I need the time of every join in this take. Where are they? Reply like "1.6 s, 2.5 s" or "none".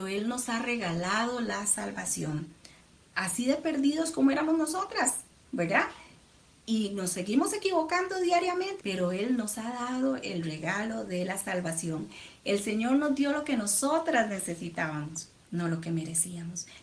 8.8 s